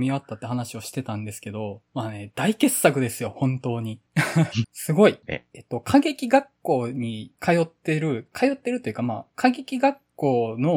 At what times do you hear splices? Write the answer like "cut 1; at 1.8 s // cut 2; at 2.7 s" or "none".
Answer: cut 1; at 4.6 s